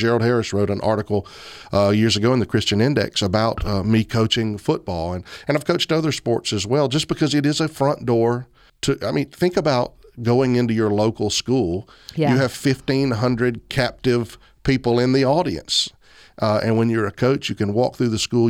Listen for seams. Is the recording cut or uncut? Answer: uncut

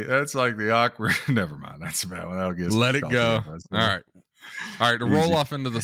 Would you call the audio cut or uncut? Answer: uncut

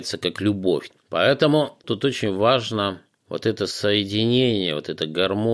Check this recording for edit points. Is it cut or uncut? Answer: cut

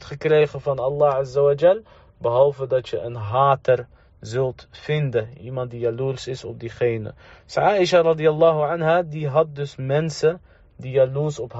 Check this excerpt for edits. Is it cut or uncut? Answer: uncut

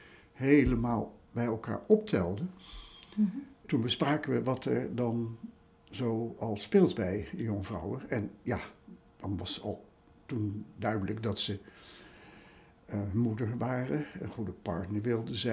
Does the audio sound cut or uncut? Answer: cut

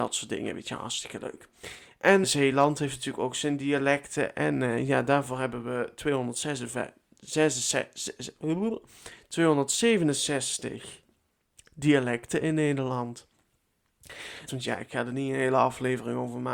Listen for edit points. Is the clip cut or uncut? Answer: cut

